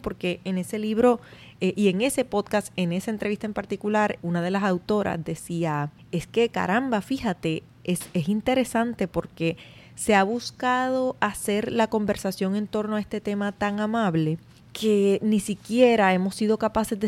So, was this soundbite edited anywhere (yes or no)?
no